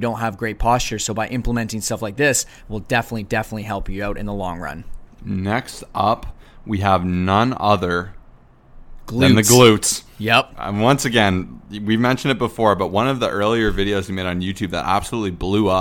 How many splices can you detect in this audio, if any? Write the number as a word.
zero